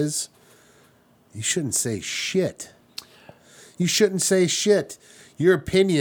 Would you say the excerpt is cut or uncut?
uncut